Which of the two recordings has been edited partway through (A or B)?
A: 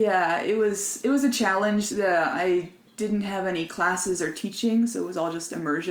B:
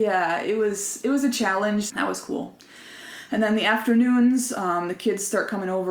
B